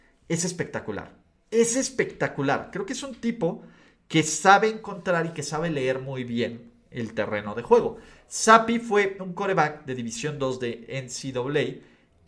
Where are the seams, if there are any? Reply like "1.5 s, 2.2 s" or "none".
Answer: none